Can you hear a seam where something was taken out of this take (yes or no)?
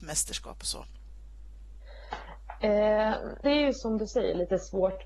yes